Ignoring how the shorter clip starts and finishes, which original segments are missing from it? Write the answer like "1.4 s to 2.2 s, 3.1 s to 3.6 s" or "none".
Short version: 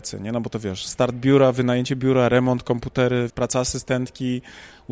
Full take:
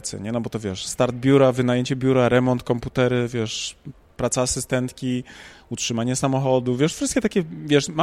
3.3 s to 4.1 s